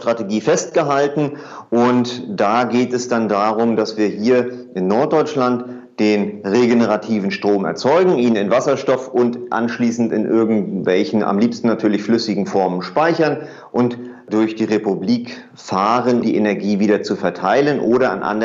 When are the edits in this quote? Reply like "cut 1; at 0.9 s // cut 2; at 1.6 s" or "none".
cut 1; at 16.2 s